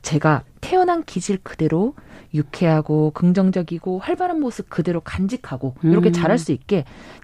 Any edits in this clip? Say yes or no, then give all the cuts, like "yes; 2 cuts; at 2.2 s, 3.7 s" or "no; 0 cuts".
no; 0 cuts